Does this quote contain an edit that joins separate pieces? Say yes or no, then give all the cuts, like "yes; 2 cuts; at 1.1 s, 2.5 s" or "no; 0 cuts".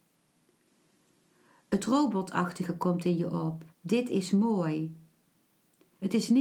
yes; 1 cut; at 3.7 s